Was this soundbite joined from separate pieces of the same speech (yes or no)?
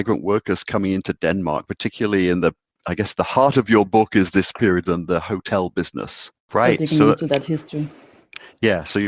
yes